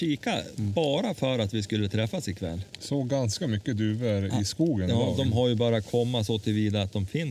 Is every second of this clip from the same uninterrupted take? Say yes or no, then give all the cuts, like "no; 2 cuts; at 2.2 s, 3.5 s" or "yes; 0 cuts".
yes; 0 cuts